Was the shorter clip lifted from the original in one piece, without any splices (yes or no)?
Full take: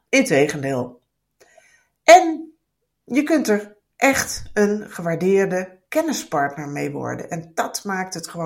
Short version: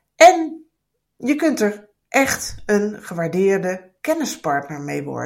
yes